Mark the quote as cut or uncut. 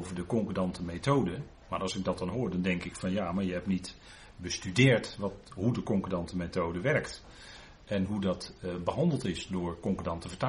uncut